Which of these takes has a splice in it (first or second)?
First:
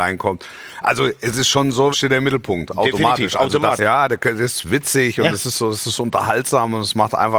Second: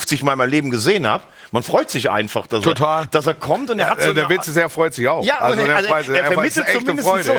first